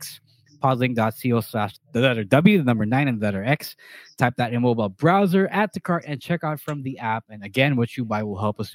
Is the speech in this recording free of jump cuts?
yes; 0 cuts

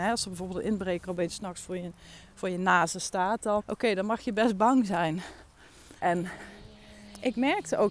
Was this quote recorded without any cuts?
no; 2 cuts; at 3.6 s, 6.0 s

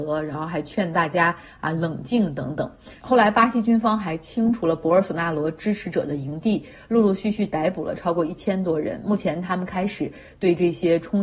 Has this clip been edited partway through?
yes; 1 cut; at 3.0 s

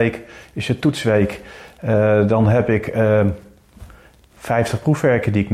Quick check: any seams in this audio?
no; 0 cuts

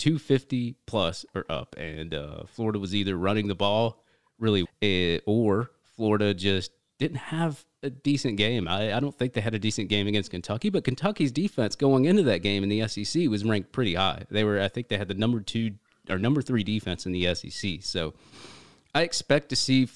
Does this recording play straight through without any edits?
no; 1 cut; at 4.6 s

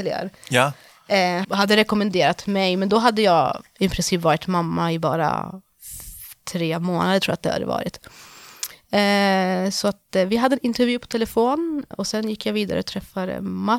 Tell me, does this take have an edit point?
yes; 2 cuts; at 1.4 s, 11.9 s

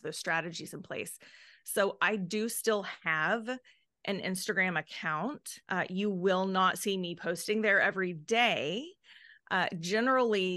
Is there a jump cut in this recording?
yes; 1 cut; at 5.6 s

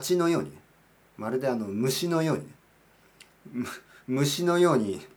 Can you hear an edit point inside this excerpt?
no; 0 cuts

